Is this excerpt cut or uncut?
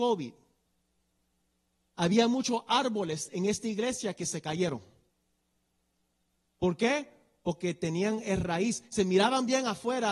uncut